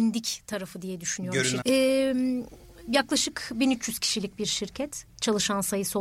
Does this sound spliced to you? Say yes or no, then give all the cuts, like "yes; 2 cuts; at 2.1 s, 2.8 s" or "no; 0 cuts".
yes; 1 cut; at 1.6 s